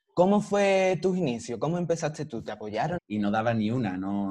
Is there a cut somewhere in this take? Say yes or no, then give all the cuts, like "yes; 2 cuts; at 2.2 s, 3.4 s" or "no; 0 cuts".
yes; 1 cut; at 3.0 s